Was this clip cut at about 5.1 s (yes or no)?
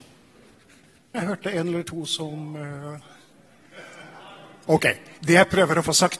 no